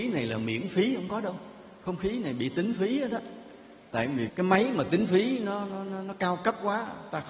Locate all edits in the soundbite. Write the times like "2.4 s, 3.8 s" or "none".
4.3 s